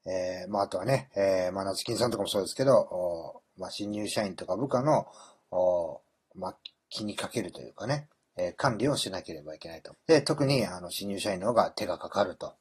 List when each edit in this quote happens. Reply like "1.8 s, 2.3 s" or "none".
9.9 s